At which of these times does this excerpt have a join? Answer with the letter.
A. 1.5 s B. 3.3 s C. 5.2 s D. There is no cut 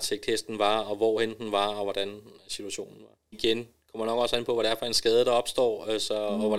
B